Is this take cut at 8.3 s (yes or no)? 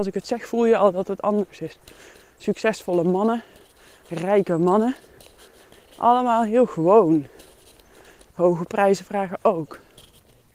yes